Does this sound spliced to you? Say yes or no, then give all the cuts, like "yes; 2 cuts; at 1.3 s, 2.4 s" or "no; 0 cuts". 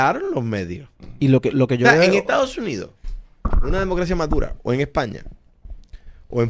yes; 1 cut; at 1.5 s